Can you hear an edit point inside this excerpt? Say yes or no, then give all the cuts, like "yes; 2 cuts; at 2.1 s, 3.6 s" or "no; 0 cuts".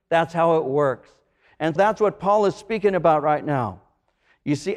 yes; 1 cut; at 1.8 s